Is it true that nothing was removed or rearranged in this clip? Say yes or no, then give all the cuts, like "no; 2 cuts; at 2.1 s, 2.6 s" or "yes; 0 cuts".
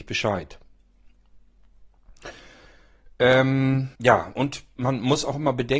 no; 1 cut; at 3.9 s